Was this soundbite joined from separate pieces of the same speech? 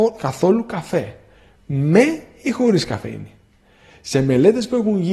no; 0 cuts

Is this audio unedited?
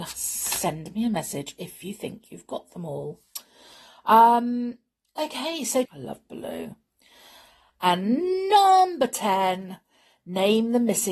no; 1 cut; at 5.8 s

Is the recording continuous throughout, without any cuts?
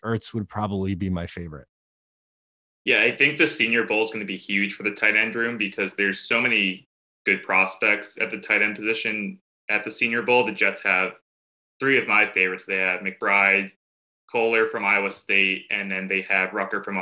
yes; 0 cuts

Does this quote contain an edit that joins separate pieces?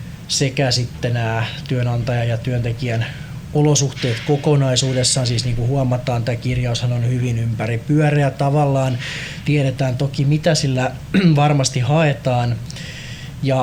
no; 0 cuts

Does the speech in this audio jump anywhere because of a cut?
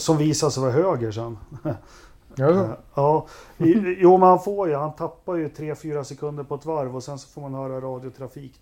no; 0 cuts

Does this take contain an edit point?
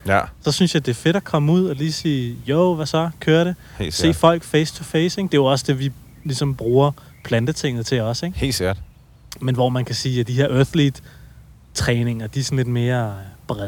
no; 0 cuts

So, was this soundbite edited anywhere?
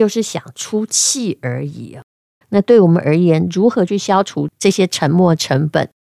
yes; 1 cut; at 2.4 s

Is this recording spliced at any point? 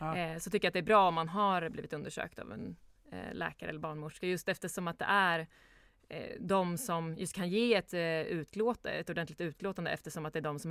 no; 0 cuts

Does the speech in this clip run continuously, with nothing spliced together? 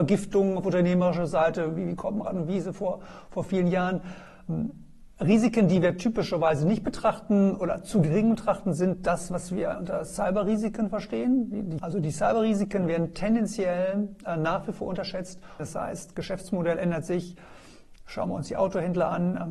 no; 2 cuts; at 11.8 s, 15.6 s

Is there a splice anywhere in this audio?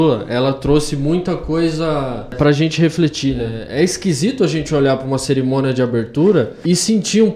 no; 0 cuts

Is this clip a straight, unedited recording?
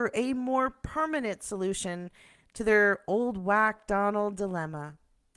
yes; 0 cuts

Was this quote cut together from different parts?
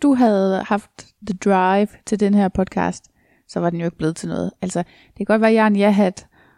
yes; 1 cut; at 1.2 s

